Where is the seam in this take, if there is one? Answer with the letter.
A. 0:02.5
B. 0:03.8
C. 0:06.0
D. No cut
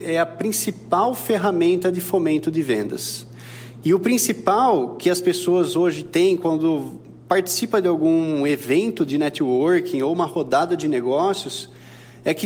B